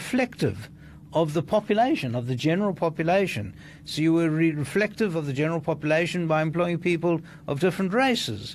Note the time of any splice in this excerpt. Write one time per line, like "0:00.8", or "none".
0:03.9